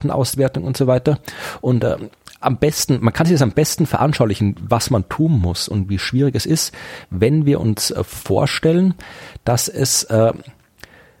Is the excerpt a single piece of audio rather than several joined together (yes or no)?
yes